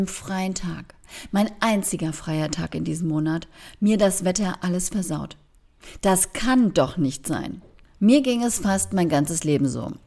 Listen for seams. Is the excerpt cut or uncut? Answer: cut